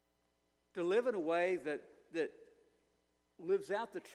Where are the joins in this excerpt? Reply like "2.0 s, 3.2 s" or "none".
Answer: none

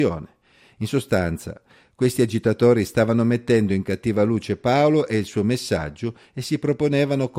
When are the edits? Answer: none

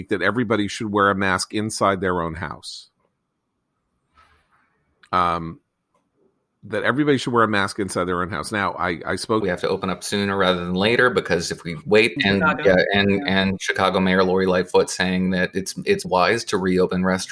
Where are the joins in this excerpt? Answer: 9.4 s, 12.2 s, 16.0 s

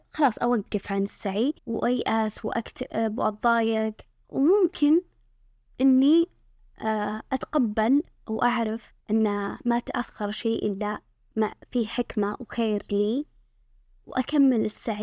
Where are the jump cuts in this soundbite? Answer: 1.6 s, 9.0 s

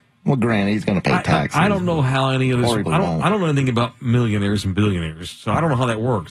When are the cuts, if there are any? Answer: 2.9 s

